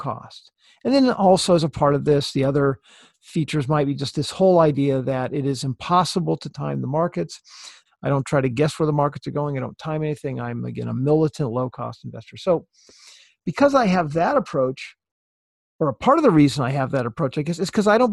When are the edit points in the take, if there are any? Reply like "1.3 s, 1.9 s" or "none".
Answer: 7.9 s